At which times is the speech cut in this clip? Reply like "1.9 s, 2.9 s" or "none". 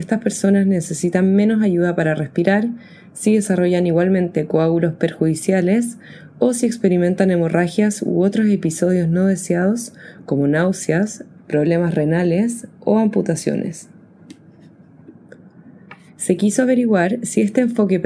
11.4 s, 16.1 s